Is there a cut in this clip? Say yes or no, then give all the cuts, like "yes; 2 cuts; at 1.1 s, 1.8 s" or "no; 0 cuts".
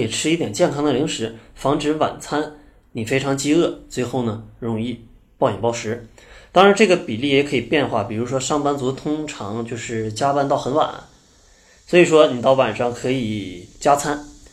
no; 0 cuts